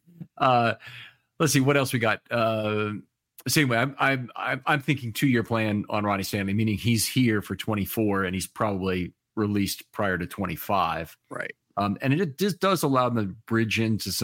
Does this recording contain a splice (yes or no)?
no